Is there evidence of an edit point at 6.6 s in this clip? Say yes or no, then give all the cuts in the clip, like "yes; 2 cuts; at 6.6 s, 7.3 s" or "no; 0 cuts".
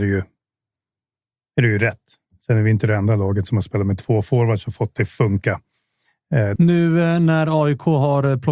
yes; 1 cut; at 6.6 s